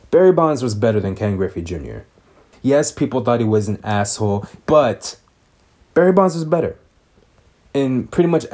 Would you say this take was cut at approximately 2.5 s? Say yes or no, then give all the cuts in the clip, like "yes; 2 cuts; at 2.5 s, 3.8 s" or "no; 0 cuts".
yes; 2 cuts; at 2.5 s, 4.6 s